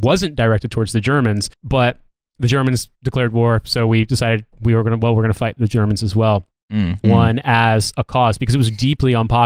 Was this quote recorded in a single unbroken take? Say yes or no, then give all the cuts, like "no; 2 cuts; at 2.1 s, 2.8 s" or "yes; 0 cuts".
no; 2 cuts; at 1.5 s, 7.0 s